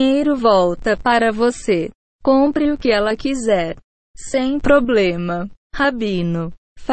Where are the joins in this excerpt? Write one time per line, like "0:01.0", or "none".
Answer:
0:02.0
0:04.0